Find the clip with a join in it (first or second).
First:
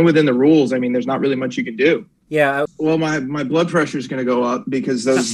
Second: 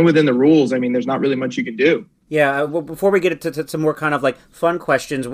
first